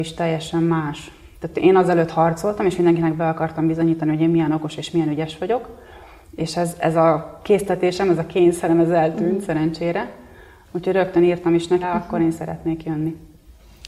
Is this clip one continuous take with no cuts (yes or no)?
no